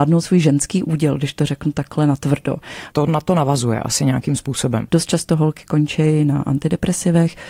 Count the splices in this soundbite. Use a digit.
2